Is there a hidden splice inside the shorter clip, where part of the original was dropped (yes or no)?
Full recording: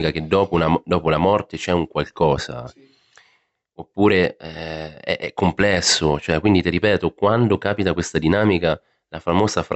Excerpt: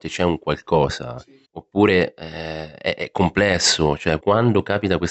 yes